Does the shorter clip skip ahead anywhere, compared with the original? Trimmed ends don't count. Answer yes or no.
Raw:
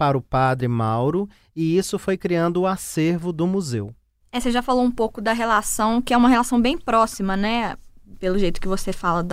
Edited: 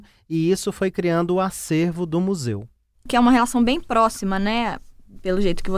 yes